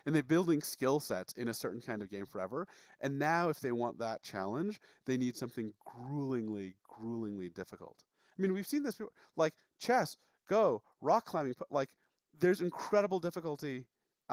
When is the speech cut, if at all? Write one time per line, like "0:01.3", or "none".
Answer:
none